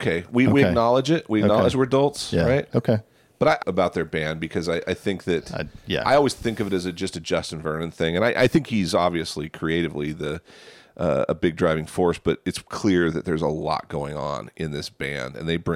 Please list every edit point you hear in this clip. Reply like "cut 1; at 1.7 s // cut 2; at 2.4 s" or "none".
cut 1; at 3.6 s